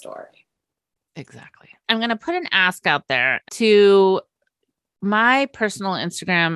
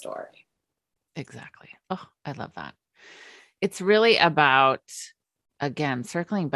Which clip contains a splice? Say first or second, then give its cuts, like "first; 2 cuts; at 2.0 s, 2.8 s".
first; 2 cuts; at 1.9 s, 3.4 s